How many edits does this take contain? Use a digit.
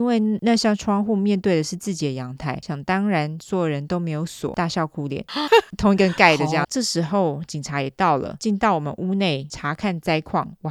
2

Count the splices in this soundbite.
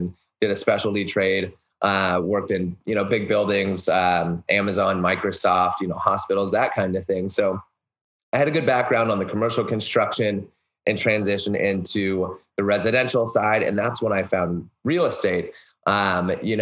0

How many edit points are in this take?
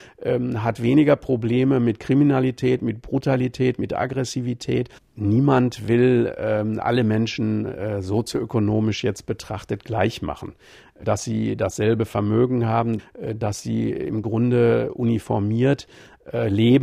3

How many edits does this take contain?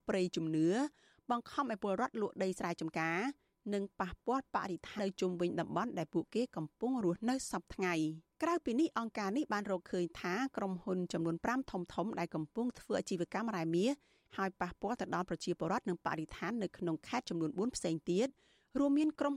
2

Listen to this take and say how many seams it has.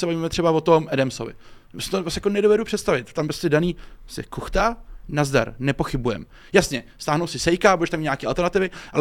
0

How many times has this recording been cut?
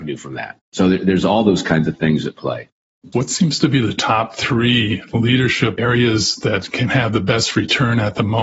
1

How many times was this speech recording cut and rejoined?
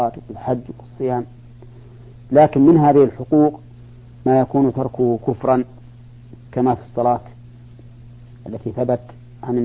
1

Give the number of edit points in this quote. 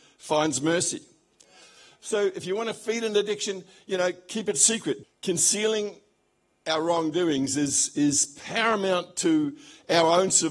1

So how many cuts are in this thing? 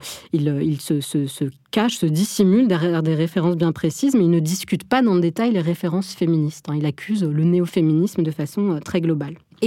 0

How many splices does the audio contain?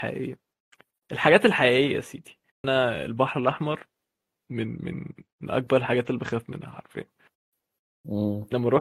1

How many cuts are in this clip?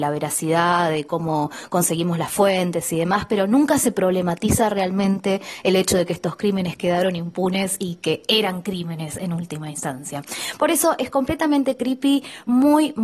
0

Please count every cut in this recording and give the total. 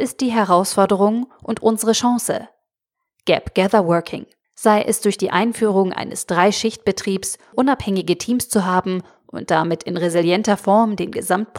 2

